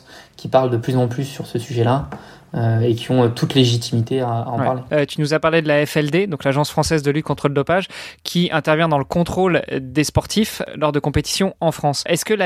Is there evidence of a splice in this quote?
no; 0 cuts

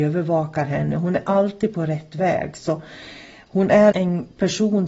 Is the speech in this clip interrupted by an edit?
yes; 1 cut; at 3.9 s

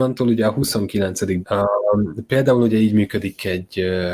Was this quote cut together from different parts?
yes; 1 cut; at 1.4 s

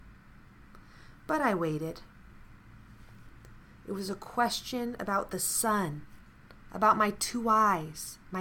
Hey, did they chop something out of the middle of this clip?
no; 0 cuts

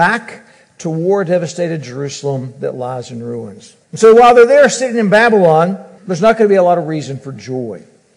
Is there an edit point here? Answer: yes; 2 cuts; at 3.8 s, 6.0 s

